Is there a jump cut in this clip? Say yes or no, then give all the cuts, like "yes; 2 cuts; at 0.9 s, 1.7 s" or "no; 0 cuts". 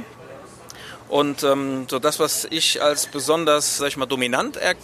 yes; 1 cut; at 3.8 s